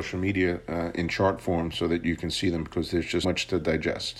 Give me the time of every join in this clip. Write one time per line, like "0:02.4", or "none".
0:03.2